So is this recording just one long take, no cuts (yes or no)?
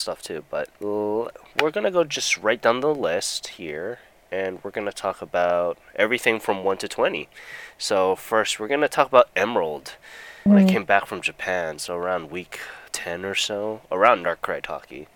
no